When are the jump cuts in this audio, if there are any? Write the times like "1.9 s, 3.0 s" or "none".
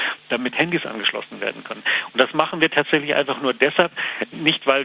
none